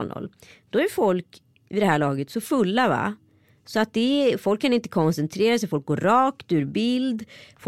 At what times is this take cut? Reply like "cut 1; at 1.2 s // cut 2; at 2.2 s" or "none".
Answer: none